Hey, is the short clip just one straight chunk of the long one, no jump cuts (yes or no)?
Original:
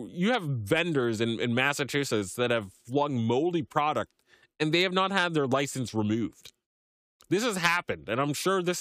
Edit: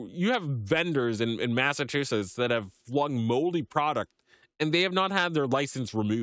yes